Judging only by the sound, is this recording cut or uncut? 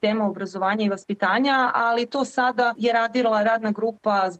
cut